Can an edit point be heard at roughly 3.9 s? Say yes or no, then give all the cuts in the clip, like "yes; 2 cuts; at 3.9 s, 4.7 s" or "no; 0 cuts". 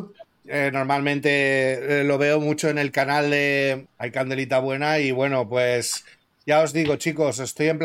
yes; 1 cut; at 3.9 s